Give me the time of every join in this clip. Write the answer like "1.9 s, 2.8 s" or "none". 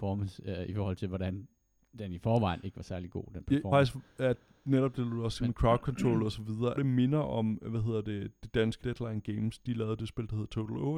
3.7 s, 6.8 s, 8.8 s